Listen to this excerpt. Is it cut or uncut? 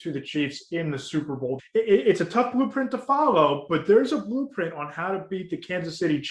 cut